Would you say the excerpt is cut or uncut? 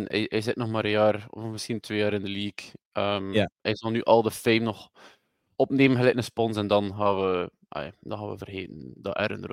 uncut